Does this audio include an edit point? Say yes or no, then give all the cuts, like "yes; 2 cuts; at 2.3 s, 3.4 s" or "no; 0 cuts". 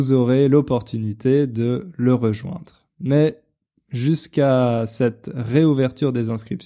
no; 0 cuts